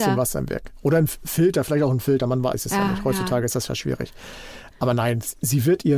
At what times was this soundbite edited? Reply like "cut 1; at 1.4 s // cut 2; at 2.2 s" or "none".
none

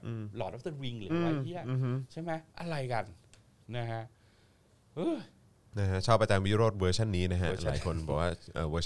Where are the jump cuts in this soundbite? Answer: cut 1; at 1.1 s // cut 2; at 2.5 s

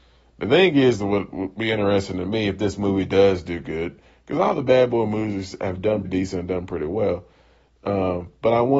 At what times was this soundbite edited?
cut 1; at 6.0 s

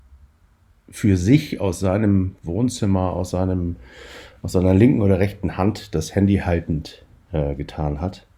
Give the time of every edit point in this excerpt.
none

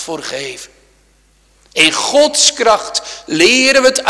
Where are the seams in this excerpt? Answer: none

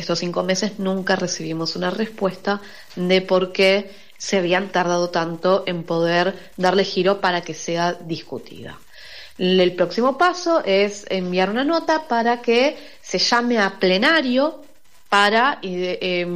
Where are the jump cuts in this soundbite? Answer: none

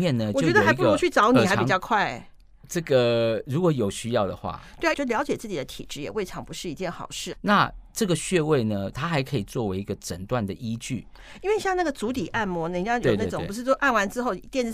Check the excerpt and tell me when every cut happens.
cut 1; at 4.9 s // cut 2; at 7.3 s // cut 3; at 8.9 s

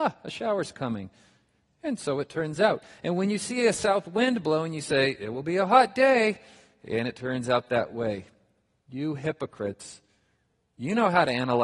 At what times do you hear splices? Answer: none

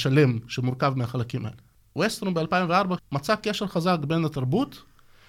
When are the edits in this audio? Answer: cut 1; at 1.8 s // cut 2; at 3.0 s

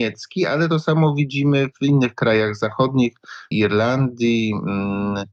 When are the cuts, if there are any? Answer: cut 1; at 3.5 s

